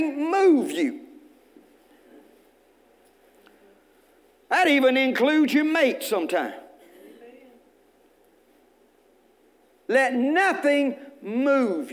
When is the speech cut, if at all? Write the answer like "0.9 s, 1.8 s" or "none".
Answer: none